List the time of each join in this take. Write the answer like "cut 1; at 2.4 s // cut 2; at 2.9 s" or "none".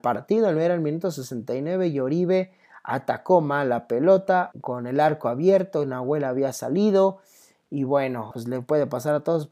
cut 1; at 4.5 s // cut 2; at 8.3 s